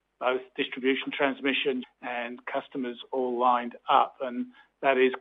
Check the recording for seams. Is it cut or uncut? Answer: cut